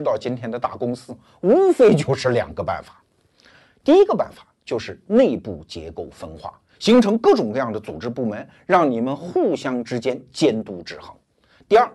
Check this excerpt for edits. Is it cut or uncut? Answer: uncut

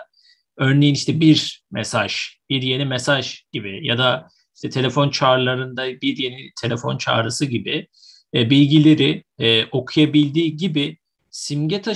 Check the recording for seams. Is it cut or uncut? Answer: uncut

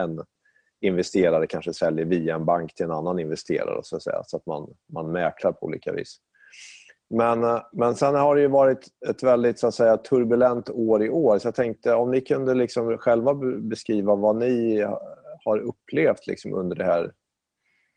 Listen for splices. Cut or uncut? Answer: uncut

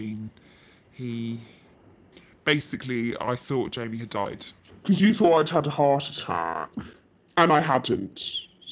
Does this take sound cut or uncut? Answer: uncut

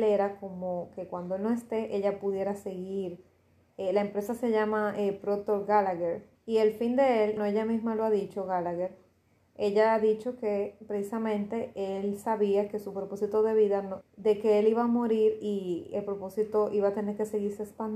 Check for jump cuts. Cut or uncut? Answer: cut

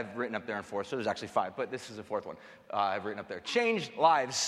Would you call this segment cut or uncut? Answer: uncut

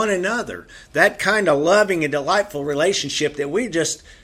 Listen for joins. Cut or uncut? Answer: uncut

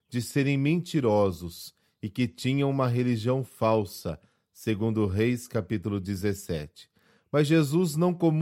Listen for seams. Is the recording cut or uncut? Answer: uncut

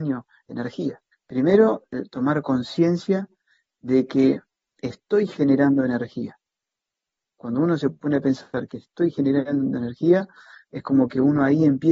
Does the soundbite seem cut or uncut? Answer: cut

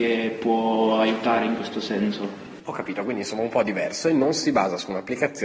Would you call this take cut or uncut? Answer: uncut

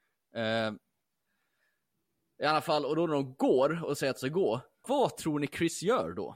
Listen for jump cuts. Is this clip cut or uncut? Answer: cut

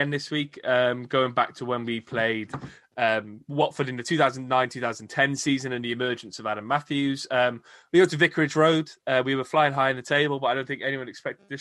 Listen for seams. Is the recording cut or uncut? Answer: uncut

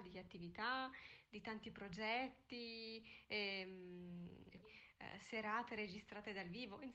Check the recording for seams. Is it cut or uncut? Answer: cut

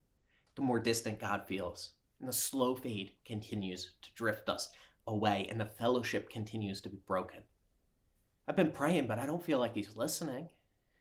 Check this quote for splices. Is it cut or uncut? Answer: cut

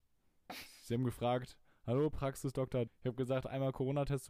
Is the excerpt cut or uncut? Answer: cut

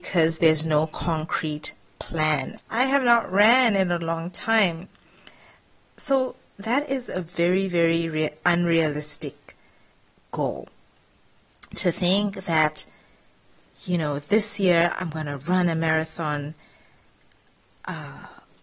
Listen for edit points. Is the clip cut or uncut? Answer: cut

